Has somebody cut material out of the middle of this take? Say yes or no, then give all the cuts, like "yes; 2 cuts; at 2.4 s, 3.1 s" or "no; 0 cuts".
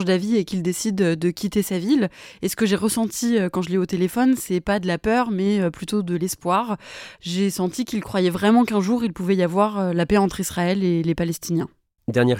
no; 0 cuts